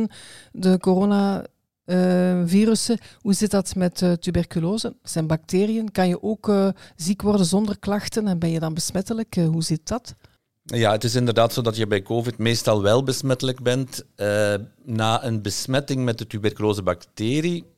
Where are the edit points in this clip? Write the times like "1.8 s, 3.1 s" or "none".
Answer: none